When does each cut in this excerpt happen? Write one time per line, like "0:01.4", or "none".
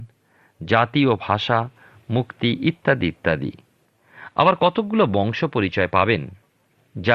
none